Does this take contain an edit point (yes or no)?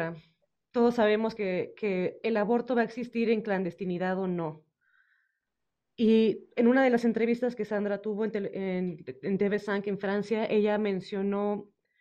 no